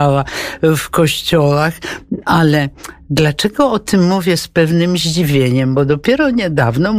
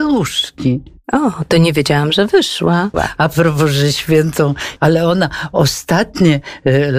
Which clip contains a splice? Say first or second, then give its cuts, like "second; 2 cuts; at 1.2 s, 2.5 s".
second; 2 cuts; at 2.9 s, 4.8 s